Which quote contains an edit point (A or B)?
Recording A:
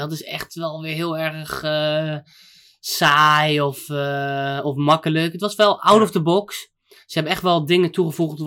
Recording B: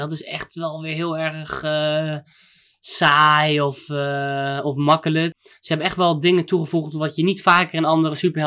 B